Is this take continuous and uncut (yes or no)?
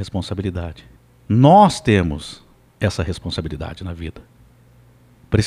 yes